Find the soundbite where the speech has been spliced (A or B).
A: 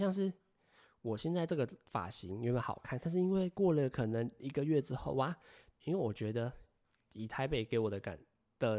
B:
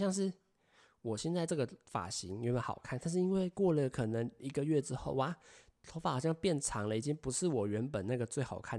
A